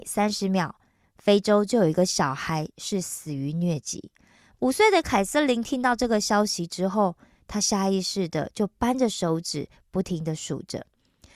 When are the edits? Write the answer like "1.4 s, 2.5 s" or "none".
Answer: none